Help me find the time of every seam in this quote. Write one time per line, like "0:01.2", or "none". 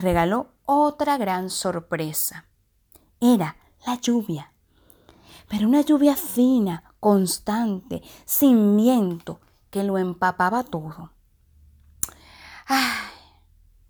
none